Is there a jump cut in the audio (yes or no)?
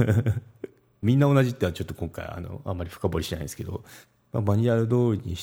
yes